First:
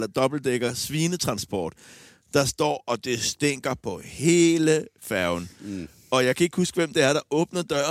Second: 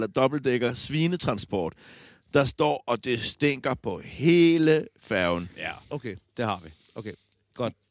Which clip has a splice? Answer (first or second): second